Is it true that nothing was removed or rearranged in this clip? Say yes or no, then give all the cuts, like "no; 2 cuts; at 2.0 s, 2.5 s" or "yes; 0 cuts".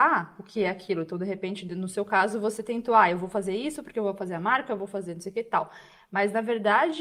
yes; 0 cuts